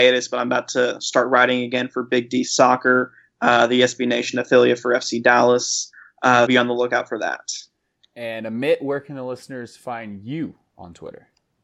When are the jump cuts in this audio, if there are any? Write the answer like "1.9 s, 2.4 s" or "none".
6.5 s